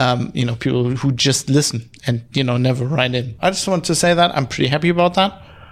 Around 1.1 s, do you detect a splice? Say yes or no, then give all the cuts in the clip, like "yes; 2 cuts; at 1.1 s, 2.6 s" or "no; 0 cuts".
no; 1 cut; at 3.4 s